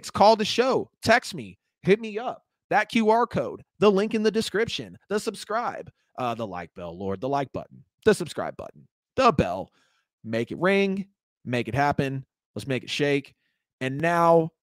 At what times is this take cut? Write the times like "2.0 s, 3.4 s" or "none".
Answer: 5.0 s